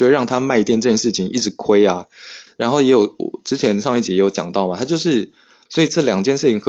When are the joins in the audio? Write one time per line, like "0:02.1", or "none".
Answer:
0:02.5
0:05.7